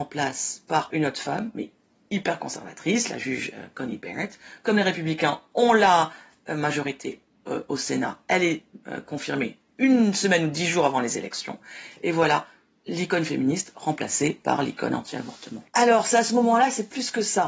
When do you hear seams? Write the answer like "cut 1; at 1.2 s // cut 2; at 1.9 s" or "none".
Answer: cut 1; at 15.7 s